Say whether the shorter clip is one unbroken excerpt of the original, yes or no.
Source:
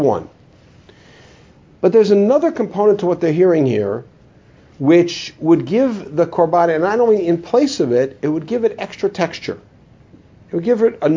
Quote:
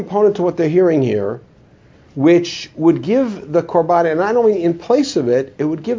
yes